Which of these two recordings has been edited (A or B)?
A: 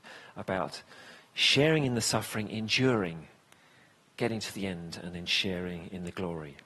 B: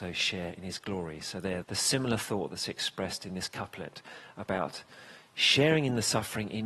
B